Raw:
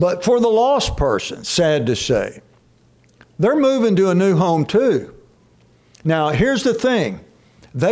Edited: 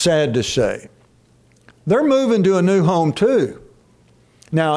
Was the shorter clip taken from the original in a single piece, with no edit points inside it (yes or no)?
yes